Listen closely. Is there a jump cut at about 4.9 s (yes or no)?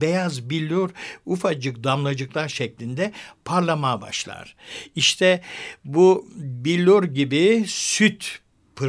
no